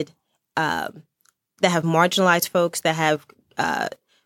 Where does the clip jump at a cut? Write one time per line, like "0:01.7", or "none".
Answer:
0:01.6